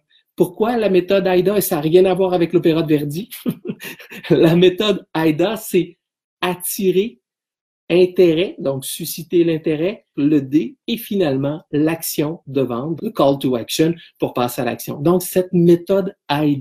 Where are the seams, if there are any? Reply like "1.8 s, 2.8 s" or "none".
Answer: 10.1 s, 13.0 s

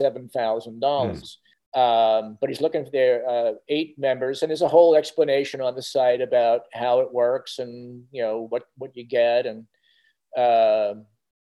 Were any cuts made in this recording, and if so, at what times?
1.5 s

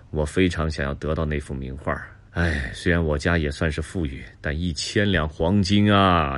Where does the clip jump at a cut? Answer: 2.3 s

